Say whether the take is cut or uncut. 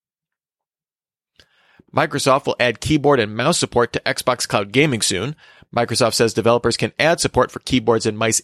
uncut